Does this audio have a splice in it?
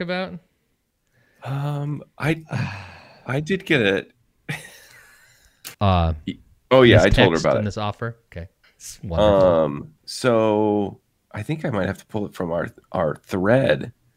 yes; 3 cuts; at 5.7 s, 8.6 s, 10.0 s

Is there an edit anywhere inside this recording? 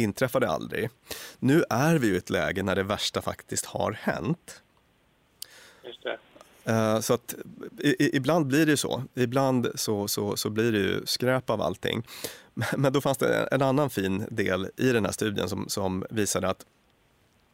no; 0 cuts

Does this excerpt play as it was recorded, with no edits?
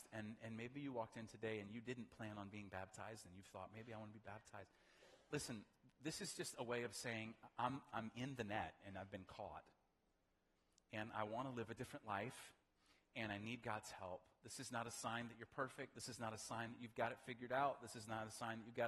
yes; 0 cuts

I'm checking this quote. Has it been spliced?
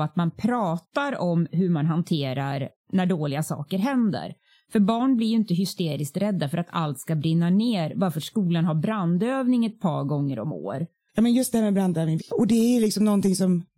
yes; 2 cuts; at 11.1 s, 12.2 s

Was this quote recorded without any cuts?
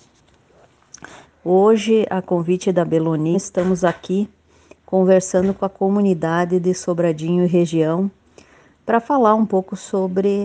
no; 2 cuts; at 1.2 s, 3.3 s

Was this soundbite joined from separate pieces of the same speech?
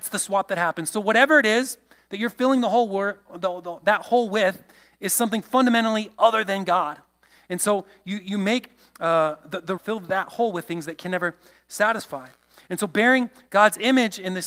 yes; 1 cut; at 9.8 s

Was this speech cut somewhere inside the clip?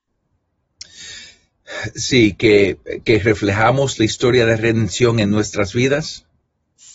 no; 0 cuts

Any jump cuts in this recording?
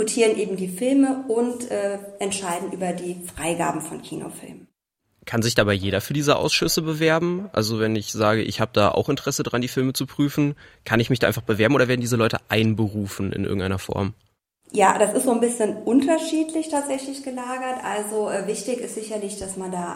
no; 0 cuts

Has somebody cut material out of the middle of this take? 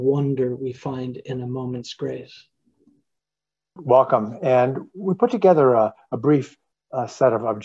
no; 0 cuts

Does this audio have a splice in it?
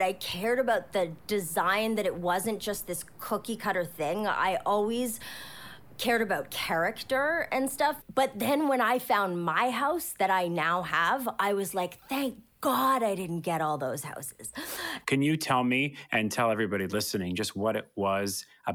yes; 1 cut; at 8.0 s

